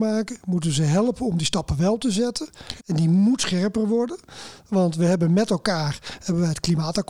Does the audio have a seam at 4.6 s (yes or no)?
no